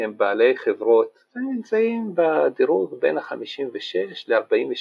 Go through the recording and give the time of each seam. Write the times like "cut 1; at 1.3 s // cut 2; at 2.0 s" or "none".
cut 1; at 1.3 s